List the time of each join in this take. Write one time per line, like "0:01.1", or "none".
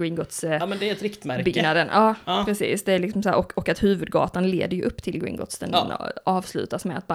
none